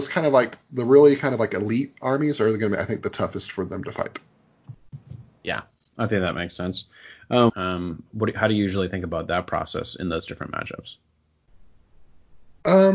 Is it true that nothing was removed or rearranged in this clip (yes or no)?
no